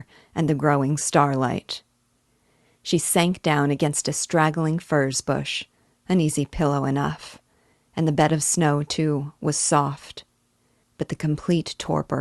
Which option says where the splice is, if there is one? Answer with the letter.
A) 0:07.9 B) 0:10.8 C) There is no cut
B